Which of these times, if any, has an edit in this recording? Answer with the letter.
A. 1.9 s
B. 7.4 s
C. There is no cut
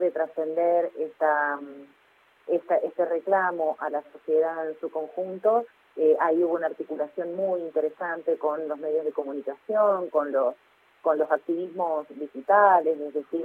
C